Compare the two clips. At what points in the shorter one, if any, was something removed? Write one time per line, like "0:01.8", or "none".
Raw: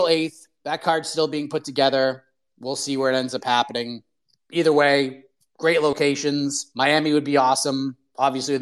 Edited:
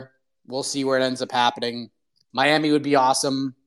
0:02.3